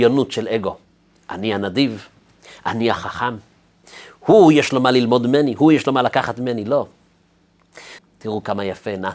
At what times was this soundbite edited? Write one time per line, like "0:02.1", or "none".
0:08.0

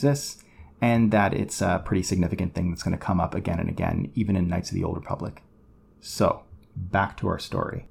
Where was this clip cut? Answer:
none

